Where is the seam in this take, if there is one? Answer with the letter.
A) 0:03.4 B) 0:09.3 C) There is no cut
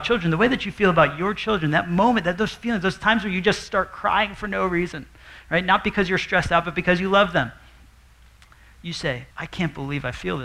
B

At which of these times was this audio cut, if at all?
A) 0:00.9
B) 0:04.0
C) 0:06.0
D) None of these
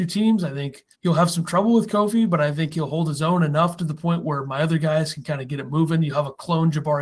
A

